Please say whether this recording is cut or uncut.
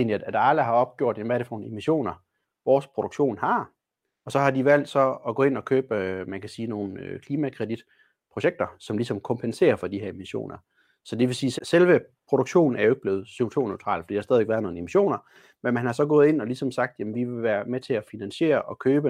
cut